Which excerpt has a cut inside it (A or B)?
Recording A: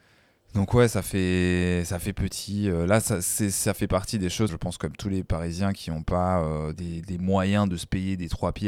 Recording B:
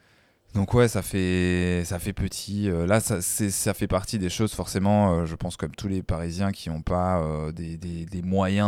A